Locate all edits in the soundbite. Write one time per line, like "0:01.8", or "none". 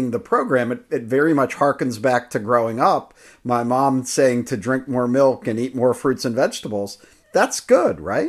none